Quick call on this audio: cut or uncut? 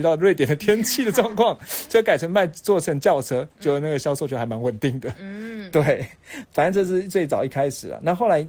cut